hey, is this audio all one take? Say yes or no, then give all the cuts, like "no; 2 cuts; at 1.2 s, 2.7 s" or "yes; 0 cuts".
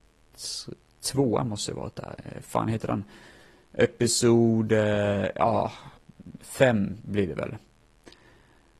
yes; 0 cuts